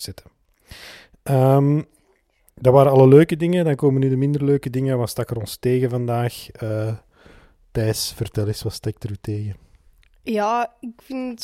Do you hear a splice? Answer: no; 0 cuts

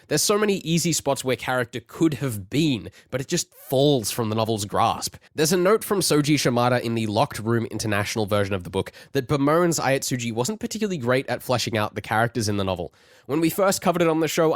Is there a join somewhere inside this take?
yes; 1 cut; at 5.3 s

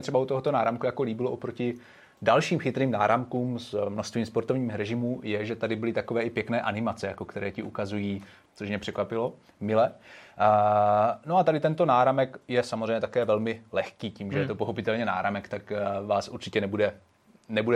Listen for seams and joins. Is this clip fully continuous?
no; 1 cut; at 8.5 s

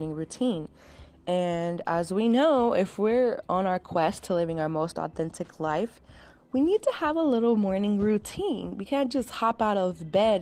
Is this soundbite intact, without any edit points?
yes; 0 cuts

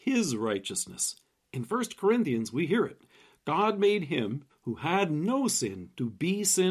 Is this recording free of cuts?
no; 1 cut; at 4.5 s

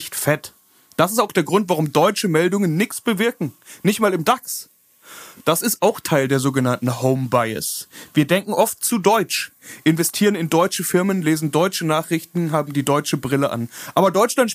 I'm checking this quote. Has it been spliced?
no; 0 cuts

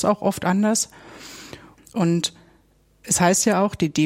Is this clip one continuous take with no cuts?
no; 1 cut; at 1.8 s

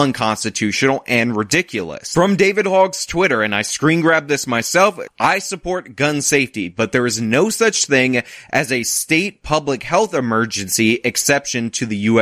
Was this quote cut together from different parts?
yes; 1 cut; at 5.1 s

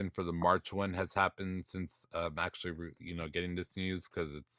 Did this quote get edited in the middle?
no; 0 cuts

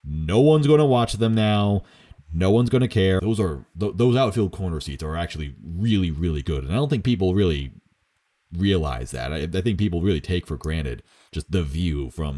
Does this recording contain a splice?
yes; 1 cut; at 3.2 s

